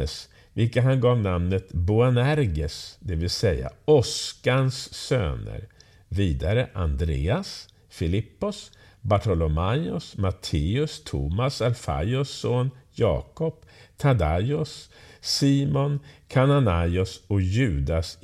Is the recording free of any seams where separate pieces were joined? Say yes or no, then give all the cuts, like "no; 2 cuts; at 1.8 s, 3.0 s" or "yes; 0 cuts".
yes; 0 cuts